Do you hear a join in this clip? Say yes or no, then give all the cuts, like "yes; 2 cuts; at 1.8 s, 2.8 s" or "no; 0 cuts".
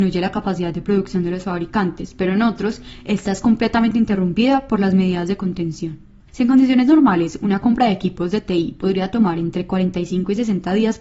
yes; 1 cut; at 6.3 s